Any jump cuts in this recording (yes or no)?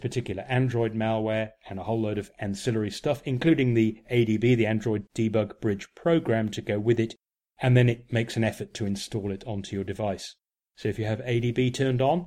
no